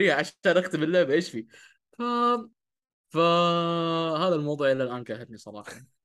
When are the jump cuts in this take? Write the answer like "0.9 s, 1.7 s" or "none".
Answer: 2.9 s